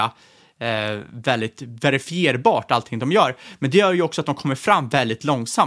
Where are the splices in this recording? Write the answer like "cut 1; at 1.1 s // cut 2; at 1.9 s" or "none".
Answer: none